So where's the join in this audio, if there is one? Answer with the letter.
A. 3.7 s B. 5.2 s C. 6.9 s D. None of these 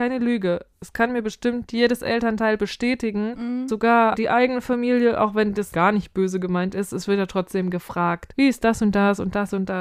D